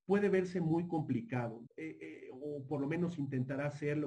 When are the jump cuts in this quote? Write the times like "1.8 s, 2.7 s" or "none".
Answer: 1.7 s